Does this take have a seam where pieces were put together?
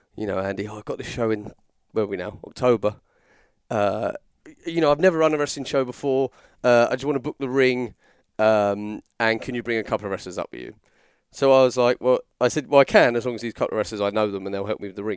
no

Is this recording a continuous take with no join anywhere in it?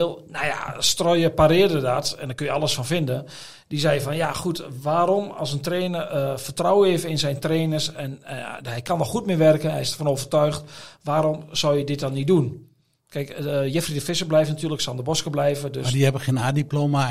yes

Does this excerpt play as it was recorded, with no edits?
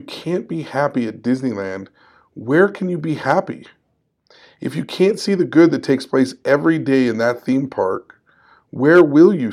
yes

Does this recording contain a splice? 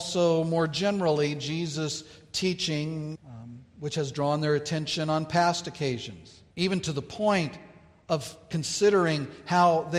yes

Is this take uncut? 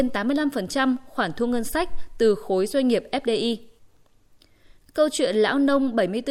yes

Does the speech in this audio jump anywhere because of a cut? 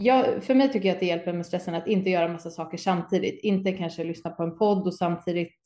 no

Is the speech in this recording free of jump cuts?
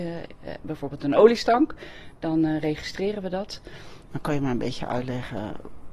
no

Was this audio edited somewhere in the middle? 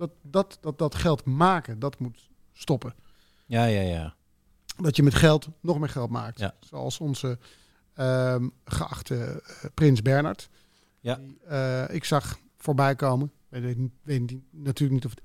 no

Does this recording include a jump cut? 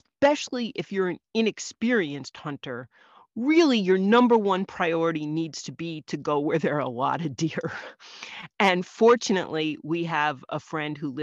no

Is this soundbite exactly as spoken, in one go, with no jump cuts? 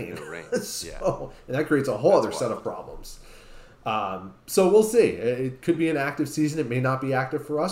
yes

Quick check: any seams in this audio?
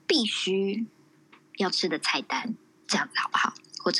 no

